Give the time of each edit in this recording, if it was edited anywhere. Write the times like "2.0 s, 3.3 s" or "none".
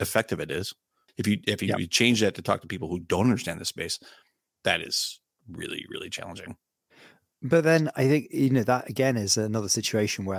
1.1 s